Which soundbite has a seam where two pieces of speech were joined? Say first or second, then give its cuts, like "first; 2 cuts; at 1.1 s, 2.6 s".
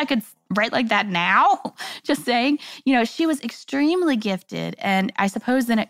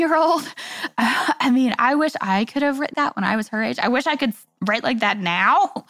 second; 1 cut; at 2.9 s